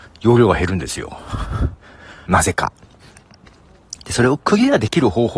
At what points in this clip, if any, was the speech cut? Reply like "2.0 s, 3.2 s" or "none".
2.3 s